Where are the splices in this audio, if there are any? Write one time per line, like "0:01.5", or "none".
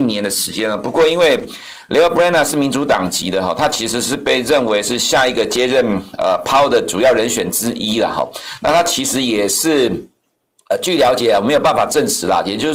none